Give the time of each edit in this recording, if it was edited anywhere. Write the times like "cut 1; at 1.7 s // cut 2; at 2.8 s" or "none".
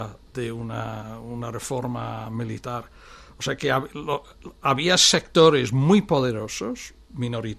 none